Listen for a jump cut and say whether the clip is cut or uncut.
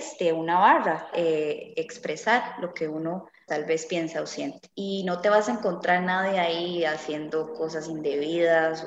cut